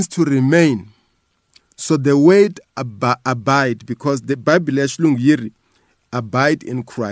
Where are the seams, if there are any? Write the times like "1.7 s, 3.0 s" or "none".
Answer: none